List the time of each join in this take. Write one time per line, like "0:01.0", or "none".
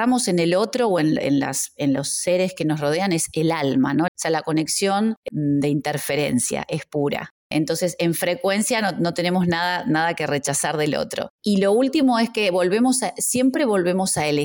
0:04.1
0:05.3